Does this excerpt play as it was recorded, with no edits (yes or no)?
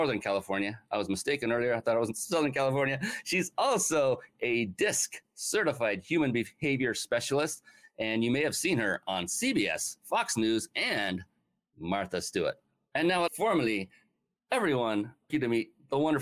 no